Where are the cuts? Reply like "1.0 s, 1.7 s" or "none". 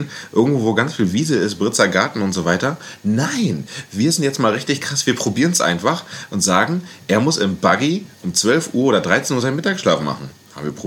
none